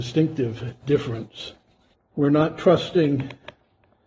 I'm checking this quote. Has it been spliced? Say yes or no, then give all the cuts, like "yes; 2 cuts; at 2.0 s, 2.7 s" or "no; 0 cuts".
yes; 1 cut; at 1.9 s